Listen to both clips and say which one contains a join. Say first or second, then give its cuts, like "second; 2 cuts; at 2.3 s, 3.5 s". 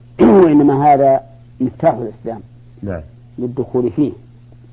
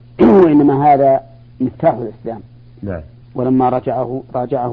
second; 1 cut; at 3.2 s